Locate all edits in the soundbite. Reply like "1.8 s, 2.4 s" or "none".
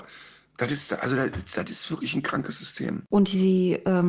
none